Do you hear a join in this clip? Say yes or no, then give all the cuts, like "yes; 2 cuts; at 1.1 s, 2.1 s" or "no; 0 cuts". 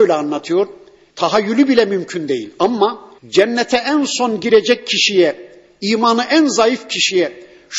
yes; 2 cuts; at 1.1 s, 3.2 s